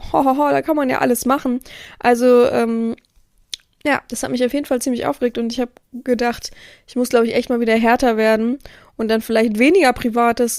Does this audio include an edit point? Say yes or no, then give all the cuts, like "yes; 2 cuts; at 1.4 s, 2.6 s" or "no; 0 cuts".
no; 0 cuts